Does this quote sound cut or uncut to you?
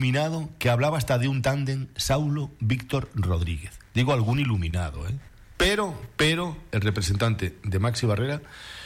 cut